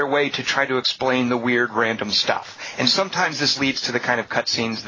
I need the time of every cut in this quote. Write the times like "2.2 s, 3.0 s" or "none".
none

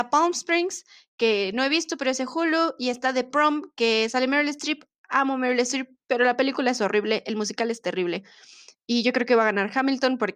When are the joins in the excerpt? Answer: none

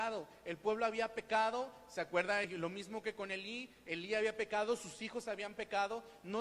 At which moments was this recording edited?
none

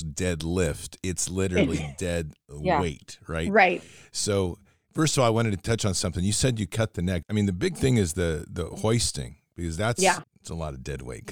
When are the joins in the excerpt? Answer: 7.2 s, 10.2 s

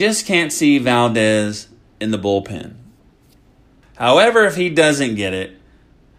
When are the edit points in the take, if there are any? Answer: 3.8 s

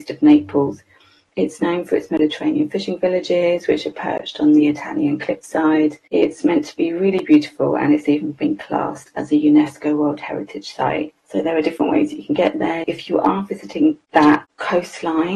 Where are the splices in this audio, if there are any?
11.2 s, 12.8 s

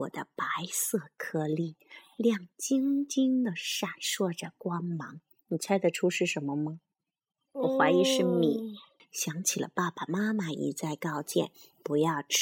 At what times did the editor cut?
9.0 s

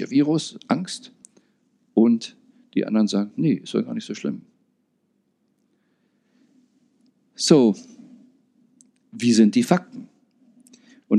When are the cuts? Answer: none

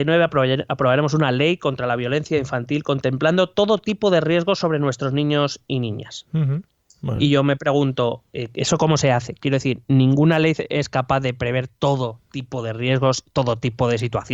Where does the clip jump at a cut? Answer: none

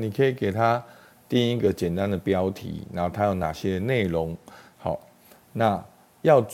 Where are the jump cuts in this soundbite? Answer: 4.7 s

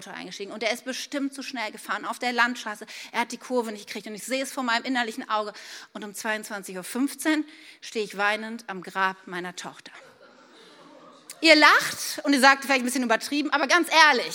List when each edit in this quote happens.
none

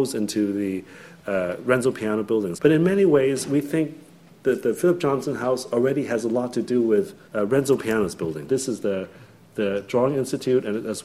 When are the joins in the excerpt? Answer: 2.5 s, 7.3 s, 8.5 s

